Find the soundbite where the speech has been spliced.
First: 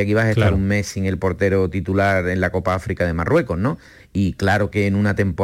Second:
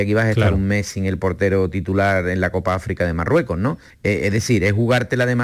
second; 1 cut; at 3.9 s

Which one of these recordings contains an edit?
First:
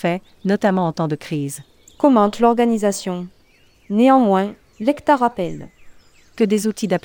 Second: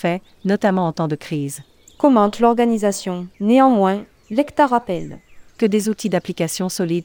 second; 2 cuts; at 3.3 s, 5.5 s

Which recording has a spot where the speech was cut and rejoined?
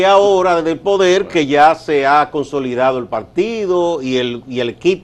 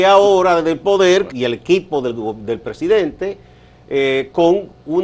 second; 1 cut; at 1.3 s

